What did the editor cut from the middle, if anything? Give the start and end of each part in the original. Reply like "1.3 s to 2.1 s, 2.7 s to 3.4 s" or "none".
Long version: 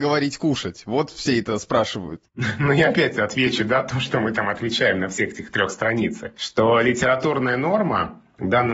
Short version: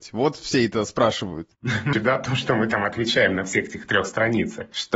2.7 s to 3.6 s

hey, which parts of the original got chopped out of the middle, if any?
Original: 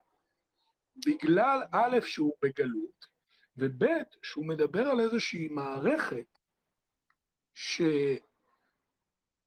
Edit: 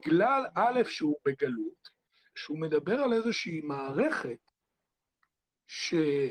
3.5 s to 4.2 s

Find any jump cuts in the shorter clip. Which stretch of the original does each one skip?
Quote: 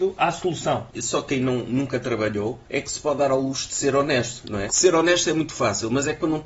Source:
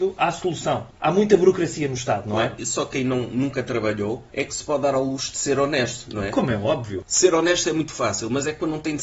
0.9 s to 2.6 s, 6.3 s to 7.1 s

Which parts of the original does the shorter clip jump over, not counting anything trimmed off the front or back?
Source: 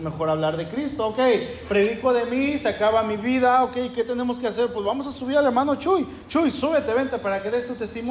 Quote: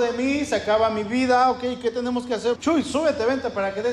4.7 s to 6.2 s

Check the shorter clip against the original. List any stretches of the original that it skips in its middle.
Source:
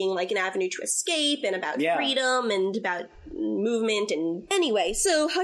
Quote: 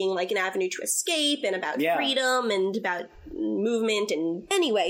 none

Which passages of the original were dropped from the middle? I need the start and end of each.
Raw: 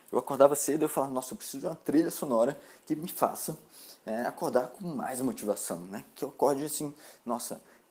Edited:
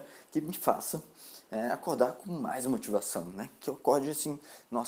none

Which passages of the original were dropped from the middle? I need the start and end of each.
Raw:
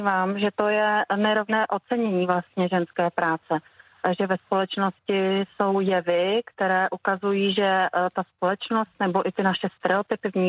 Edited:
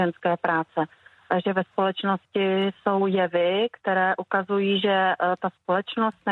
none

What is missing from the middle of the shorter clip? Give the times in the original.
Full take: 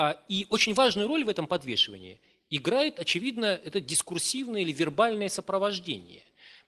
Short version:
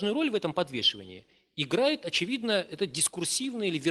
none

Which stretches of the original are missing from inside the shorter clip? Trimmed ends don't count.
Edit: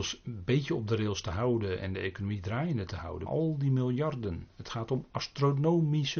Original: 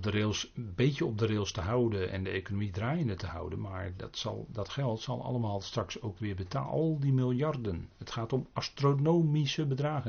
3.6 s to 6.7 s

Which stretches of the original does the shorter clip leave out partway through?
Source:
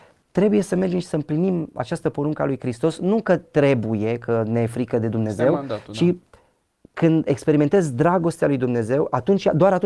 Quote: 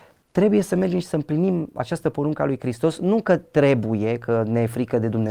none

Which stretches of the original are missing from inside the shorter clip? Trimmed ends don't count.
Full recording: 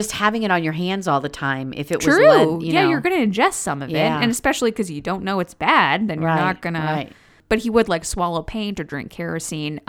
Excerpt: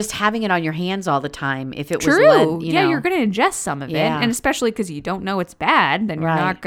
none

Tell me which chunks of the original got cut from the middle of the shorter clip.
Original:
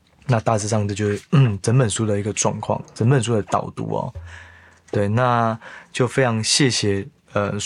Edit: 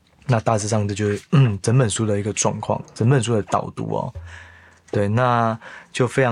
none

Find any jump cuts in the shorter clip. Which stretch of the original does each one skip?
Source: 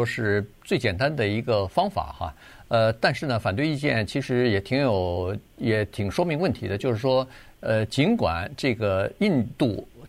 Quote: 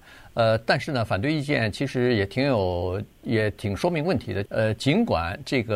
6.8 s to 7.6 s

